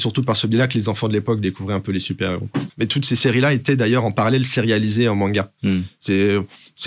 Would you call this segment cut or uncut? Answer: cut